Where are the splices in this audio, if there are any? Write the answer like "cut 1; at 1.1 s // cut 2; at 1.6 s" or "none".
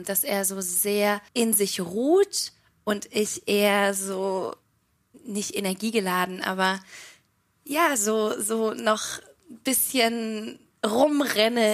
cut 1; at 1.3 s